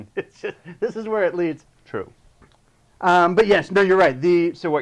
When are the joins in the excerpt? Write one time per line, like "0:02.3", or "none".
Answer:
0:01.6